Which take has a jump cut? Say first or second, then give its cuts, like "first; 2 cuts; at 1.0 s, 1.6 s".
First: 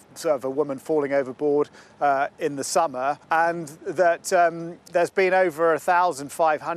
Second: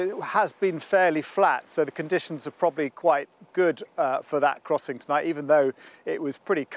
first; 2 cuts; at 3.2 s, 4.9 s